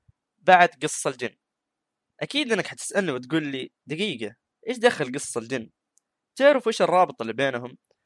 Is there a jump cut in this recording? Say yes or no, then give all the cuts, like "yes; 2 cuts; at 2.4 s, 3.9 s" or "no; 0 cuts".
no; 0 cuts